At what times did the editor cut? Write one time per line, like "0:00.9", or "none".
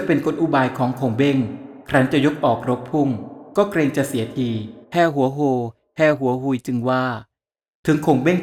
0:04.8